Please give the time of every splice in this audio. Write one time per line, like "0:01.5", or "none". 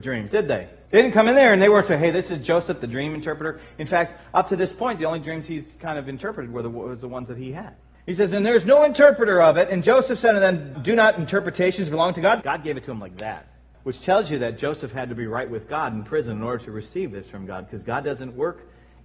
0:10.7
0:12.4